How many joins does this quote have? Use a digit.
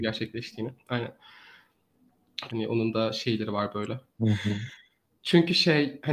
2